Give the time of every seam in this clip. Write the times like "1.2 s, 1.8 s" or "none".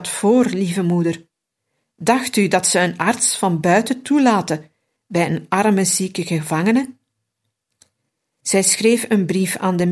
8.4 s